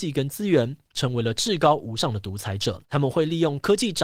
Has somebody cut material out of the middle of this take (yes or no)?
yes